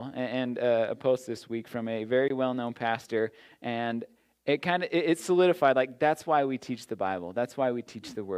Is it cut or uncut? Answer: uncut